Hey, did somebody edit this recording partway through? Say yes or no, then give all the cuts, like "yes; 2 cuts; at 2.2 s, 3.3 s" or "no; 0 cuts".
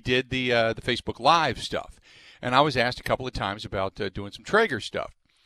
no; 0 cuts